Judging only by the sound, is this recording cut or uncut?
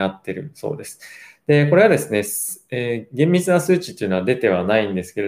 uncut